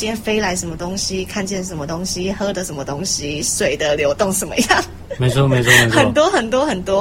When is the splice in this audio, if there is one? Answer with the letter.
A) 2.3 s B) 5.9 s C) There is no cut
C